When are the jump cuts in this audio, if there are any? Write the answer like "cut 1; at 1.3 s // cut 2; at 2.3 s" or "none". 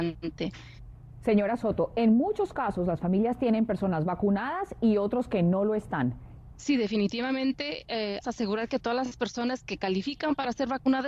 cut 1; at 6.5 s // cut 2; at 8.2 s